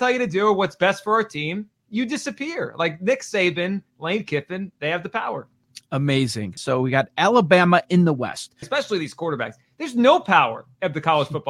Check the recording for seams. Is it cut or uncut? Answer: cut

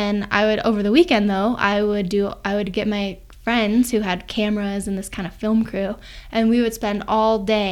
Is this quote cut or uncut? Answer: uncut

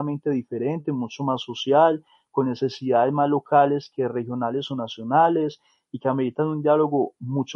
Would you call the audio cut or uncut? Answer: uncut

